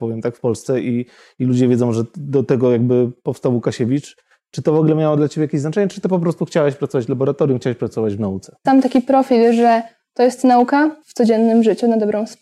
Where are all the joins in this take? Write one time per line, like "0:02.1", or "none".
0:08.6
0:11.0